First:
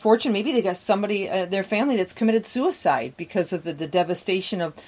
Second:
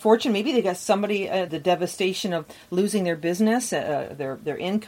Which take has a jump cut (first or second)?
second